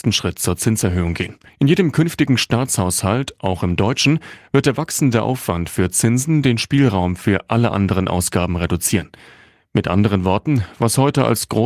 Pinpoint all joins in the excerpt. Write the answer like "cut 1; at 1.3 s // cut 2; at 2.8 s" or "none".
cut 1; at 1.5 s